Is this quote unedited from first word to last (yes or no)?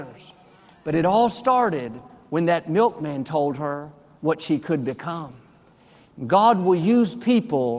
yes